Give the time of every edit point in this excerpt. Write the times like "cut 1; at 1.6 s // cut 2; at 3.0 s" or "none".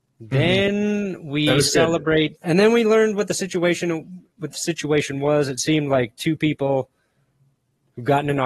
cut 1; at 2.4 s